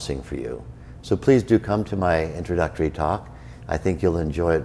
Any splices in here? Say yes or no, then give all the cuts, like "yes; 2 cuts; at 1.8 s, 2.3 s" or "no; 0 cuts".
yes; 1 cut; at 1.0 s